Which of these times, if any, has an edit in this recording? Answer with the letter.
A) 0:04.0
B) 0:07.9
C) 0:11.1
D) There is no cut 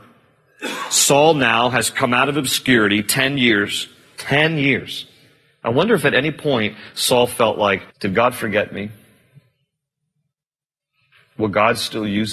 B